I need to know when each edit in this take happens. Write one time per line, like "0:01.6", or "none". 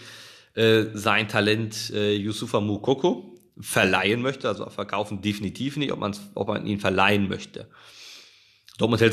none